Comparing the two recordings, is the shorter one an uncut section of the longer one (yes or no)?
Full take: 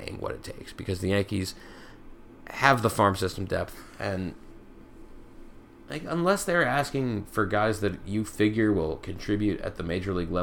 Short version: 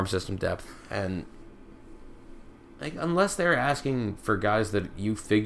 yes